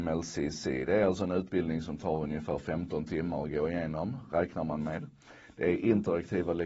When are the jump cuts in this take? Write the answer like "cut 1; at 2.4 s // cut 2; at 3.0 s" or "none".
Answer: none